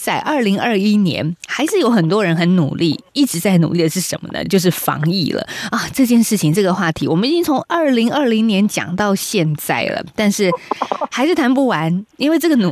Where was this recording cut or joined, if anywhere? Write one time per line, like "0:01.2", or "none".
none